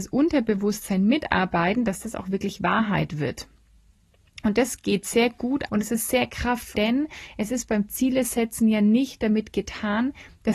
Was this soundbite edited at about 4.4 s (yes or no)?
no